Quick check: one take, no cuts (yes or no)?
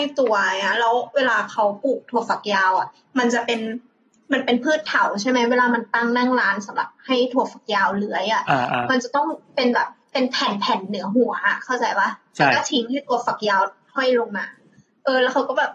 yes